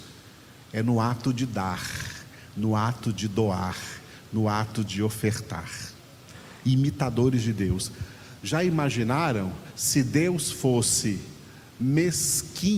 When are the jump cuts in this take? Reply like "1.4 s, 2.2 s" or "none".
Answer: none